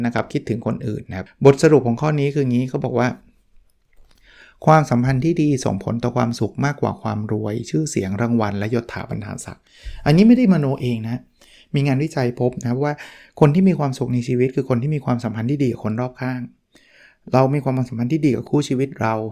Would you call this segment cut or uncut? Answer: cut